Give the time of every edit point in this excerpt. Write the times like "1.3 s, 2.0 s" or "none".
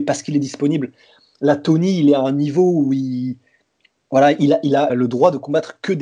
4.9 s